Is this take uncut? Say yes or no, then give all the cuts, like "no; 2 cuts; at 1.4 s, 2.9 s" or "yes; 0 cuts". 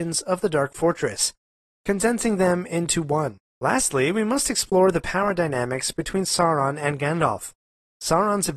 no; 1 cut; at 3.5 s